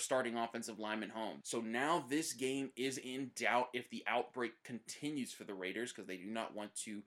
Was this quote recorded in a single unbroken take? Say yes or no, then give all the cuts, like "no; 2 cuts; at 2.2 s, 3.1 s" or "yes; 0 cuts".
no; 1 cut; at 1.4 s